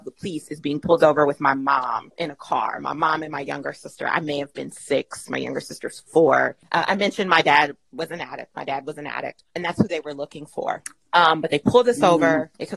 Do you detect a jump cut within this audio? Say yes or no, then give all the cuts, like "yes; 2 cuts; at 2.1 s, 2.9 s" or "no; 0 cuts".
no; 0 cuts